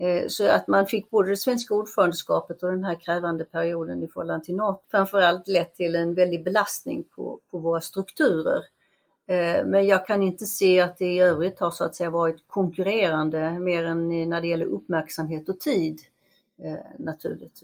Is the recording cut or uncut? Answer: cut